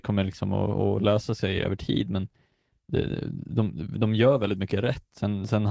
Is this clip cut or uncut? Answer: uncut